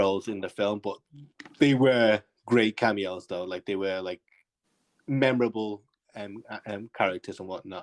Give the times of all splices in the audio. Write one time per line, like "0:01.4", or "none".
none